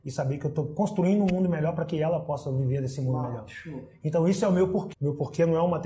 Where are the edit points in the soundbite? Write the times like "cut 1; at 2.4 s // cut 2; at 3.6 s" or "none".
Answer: cut 1; at 4.9 s

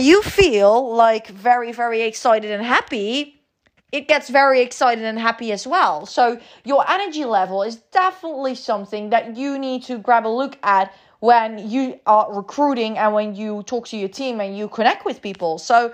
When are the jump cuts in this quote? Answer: none

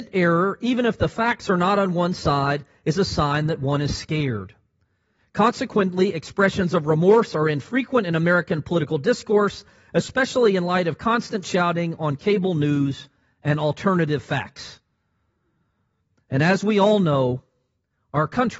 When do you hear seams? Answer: none

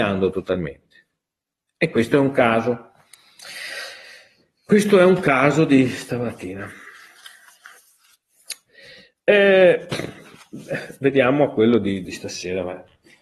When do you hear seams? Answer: cut 1; at 12.0 s

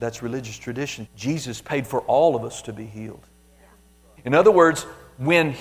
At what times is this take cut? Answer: cut 1; at 1.1 s // cut 2; at 4.2 s

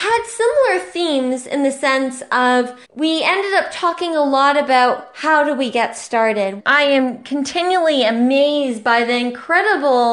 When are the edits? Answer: cut 1; at 2.8 s // cut 2; at 6.6 s

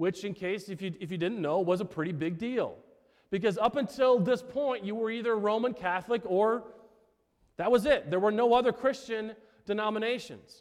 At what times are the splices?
none

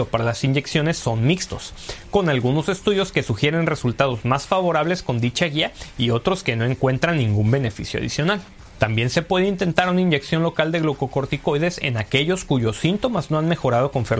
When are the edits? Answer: cut 1; at 8.7 s

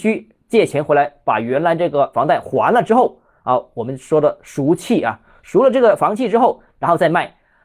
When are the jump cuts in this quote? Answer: none

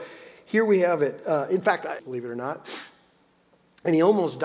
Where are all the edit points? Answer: cut 1; at 2.0 s

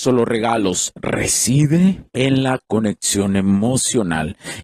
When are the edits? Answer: cut 1; at 2.1 s

